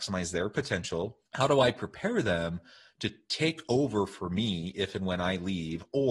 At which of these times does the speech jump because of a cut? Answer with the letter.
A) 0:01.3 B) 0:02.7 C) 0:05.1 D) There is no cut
A